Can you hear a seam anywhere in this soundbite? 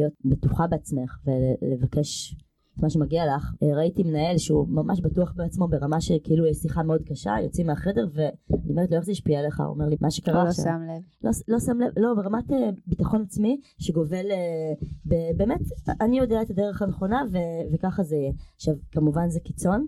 yes; 2 cuts; at 3.6 s, 9.9 s

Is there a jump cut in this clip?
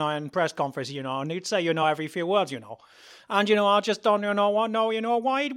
no; 0 cuts

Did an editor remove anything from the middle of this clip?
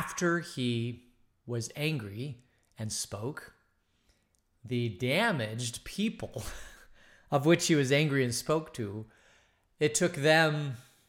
no; 0 cuts

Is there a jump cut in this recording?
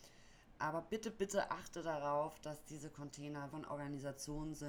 yes; 1 cut; at 3.5 s

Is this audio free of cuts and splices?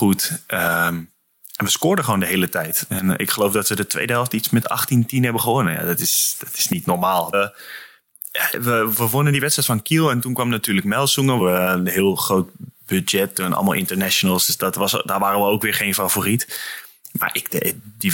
no; 2 cuts; at 7.3 s, 11.4 s

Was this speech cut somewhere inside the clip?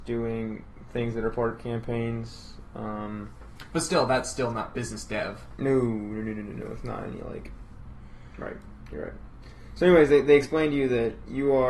no; 0 cuts

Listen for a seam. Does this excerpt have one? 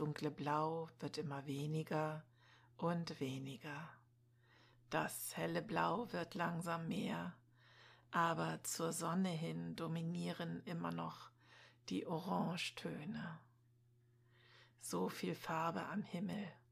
no; 0 cuts

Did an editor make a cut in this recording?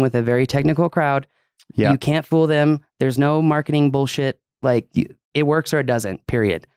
no; 0 cuts

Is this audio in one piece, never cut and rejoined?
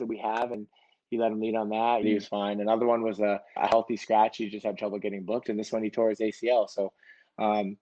no; 2 cuts; at 2.0 s, 3.6 s

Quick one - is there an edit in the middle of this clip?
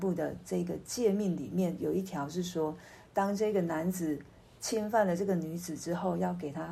no; 0 cuts

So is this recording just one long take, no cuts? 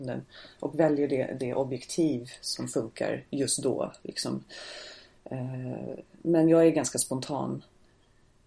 no; 1 cut; at 1.4 s

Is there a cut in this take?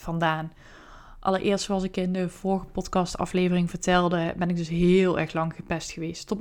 no; 0 cuts

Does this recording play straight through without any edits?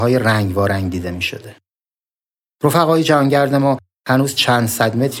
no; 1 cut; at 2.5 s

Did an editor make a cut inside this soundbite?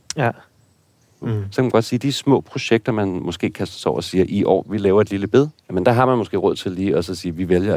yes; 2 cuts; at 1.2 s, 5.6 s

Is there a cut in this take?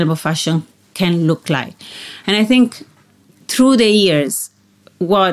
no; 0 cuts

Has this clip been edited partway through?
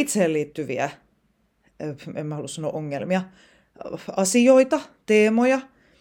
no; 0 cuts

